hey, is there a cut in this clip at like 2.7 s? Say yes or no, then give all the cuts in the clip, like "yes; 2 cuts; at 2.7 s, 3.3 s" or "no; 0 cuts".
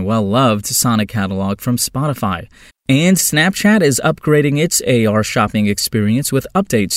yes; 1 cut; at 2.7 s